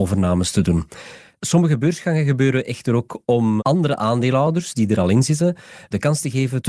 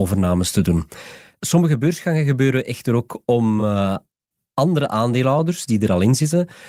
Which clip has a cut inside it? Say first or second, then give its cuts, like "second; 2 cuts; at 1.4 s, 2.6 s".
first; 1 cut; at 3.6 s